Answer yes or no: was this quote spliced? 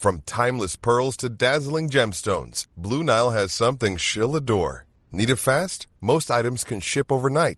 no